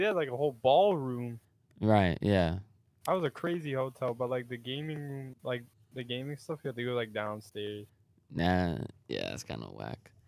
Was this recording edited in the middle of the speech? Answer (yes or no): yes